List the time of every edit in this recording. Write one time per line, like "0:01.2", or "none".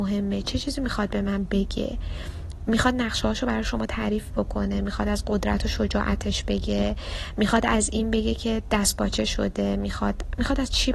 none